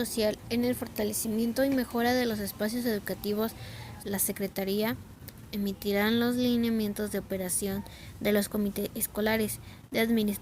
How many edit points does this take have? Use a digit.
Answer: 2